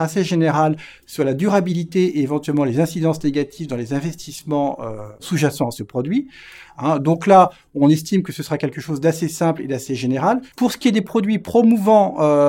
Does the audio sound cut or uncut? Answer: cut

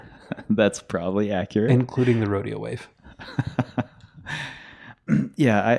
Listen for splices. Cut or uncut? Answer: uncut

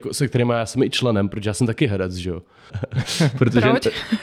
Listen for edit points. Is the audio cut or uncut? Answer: cut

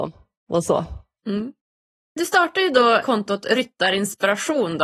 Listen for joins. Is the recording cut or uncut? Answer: cut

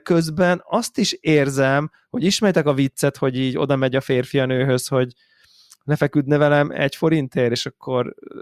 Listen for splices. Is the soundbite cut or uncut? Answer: uncut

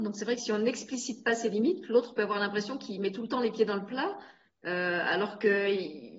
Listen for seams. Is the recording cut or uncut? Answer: uncut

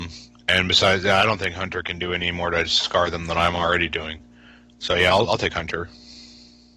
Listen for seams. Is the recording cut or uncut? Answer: uncut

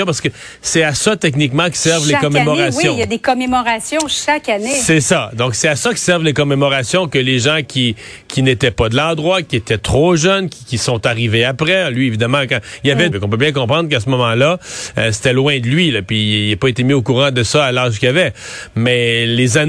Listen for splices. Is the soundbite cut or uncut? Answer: cut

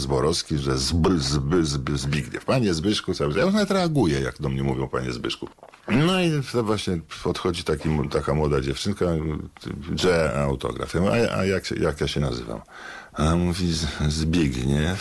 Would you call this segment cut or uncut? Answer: uncut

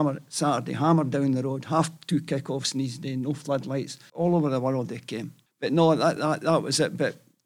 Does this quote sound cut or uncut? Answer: cut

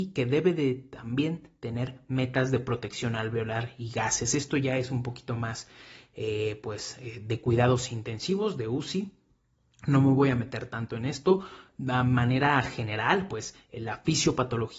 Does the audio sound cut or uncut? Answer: uncut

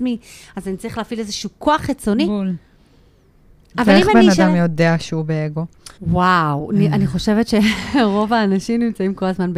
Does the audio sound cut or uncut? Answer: cut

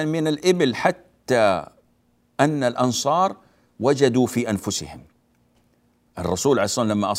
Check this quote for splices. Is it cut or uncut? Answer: uncut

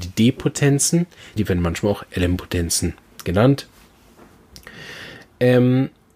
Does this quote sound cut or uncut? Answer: cut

